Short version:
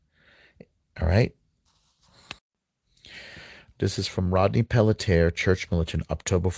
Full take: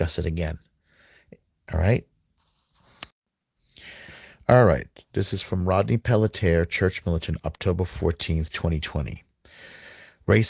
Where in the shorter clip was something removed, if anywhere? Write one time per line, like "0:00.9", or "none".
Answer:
0:03.7

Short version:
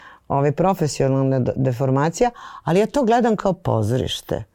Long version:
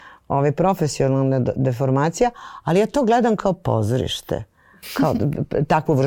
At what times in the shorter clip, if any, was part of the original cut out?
none

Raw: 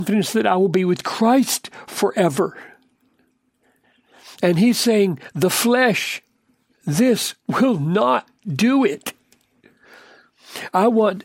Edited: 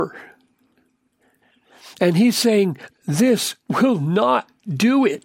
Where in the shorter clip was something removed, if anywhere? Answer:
0:02.9

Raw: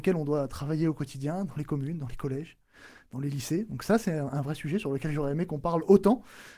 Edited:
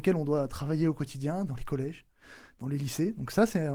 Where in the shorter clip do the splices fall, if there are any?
0:01.5

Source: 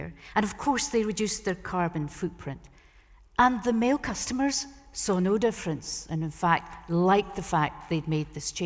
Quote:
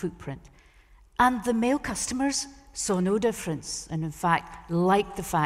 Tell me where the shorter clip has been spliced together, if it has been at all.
none

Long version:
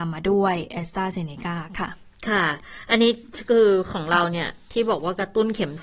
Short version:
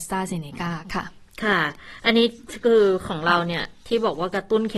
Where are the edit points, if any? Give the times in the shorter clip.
none

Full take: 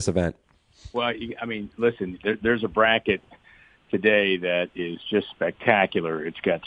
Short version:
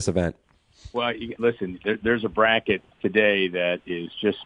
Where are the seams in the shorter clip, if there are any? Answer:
0:01.3
0:02.9

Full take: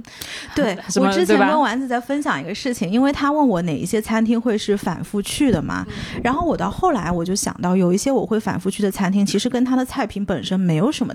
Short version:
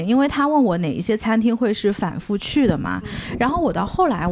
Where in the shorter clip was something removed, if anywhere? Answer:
none

